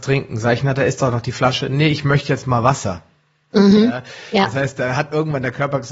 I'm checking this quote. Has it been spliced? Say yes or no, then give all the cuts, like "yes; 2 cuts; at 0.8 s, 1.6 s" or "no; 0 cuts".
no; 0 cuts